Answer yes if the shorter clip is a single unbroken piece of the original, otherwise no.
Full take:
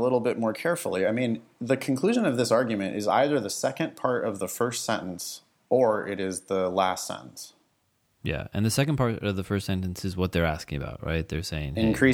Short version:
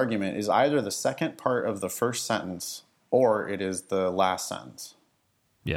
yes